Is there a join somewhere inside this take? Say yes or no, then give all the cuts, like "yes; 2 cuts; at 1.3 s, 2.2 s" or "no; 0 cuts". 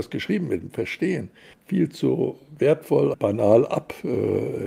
yes; 2 cuts; at 1.5 s, 3.1 s